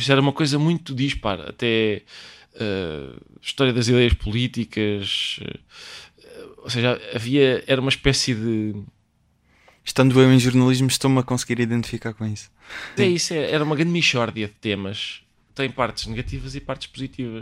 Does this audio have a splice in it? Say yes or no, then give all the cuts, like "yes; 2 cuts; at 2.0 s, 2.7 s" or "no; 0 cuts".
yes; 2 cuts; at 13.0 s, 15.5 s